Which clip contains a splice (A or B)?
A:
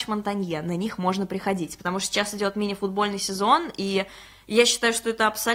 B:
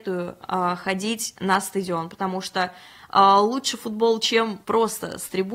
B